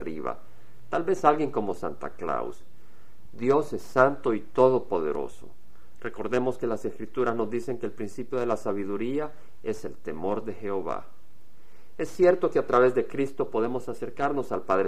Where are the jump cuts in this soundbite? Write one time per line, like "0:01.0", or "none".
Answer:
0:03.3